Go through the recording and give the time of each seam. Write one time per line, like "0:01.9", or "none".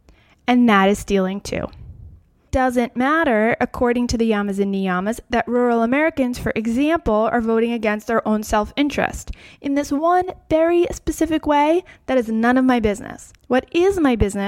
0:13.4